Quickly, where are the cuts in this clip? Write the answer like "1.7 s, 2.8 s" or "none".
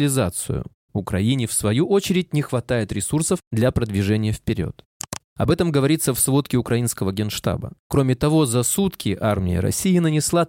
5.2 s